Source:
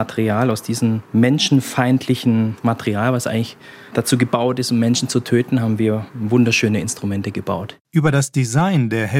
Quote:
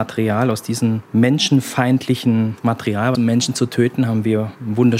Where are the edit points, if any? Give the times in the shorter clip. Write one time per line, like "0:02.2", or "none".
0:03.1